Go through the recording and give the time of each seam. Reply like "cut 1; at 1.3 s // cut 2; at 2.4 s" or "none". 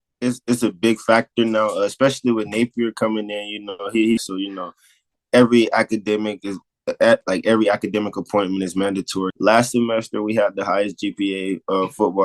cut 1; at 4.2 s // cut 2; at 9.3 s